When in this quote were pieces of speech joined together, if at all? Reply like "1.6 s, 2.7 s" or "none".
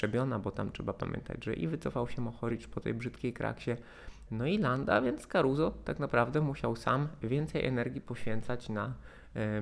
4.3 s